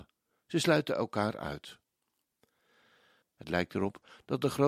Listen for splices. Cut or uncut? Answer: cut